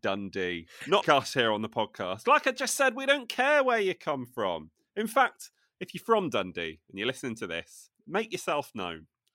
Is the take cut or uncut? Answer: cut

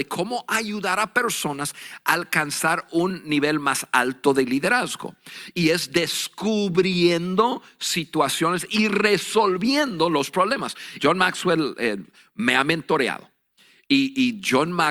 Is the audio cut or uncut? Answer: cut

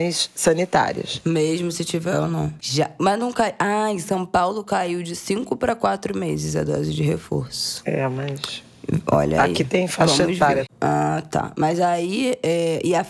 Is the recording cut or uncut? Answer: cut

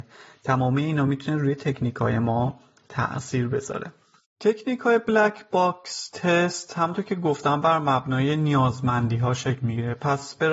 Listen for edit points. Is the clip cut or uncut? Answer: uncut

